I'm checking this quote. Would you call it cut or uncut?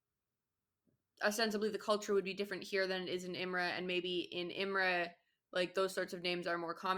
uncut